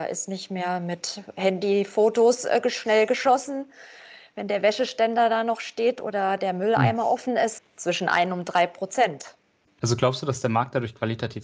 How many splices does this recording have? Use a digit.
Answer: 2